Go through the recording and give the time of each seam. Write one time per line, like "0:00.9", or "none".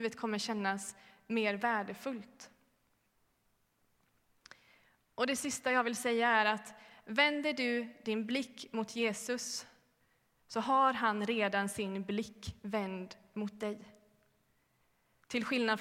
none